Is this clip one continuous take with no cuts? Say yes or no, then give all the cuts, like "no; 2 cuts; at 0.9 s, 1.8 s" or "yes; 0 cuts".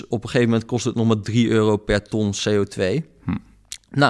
yes; 0 cuts